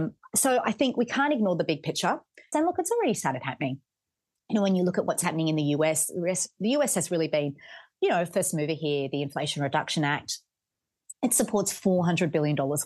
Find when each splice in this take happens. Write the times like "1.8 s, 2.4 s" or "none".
2.5 s